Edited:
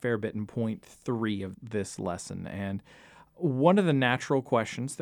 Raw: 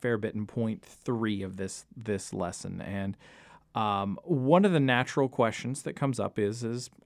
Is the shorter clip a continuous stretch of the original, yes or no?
no